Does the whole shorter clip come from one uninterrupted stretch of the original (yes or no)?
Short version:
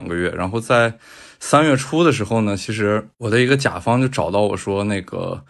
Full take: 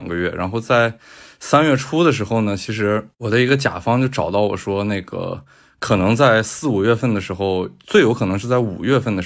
yes